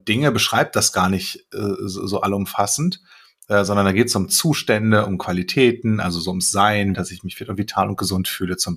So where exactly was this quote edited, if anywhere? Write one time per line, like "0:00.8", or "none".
0:06.9